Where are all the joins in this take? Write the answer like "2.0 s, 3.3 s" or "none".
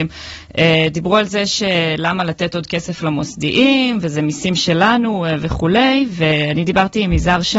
none